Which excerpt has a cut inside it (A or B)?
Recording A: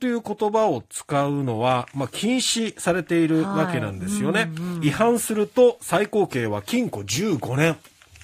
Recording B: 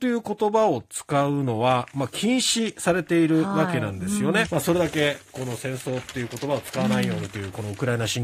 B